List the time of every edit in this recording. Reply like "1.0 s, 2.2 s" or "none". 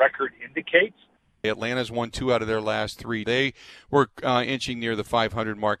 1.4 s, 3.2 s